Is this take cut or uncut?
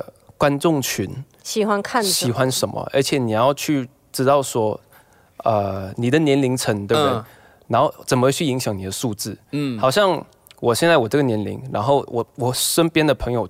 uncut